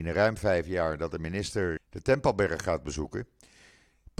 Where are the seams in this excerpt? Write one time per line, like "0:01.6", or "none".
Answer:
0:01.8